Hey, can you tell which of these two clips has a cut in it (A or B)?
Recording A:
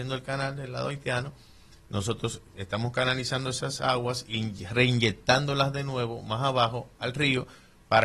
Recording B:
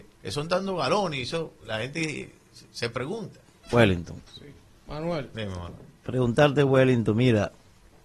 B